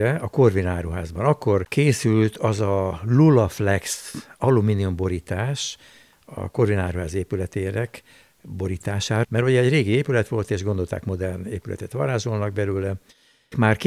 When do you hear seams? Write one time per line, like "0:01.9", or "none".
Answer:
0:09.2